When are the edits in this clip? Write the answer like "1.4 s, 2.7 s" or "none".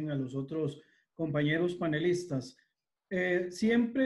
none